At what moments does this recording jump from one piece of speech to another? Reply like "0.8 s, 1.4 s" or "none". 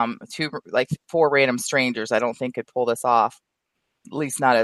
none